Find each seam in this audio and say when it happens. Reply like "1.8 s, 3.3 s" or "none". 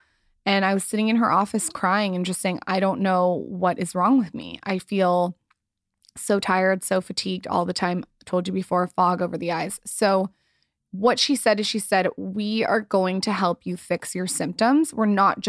none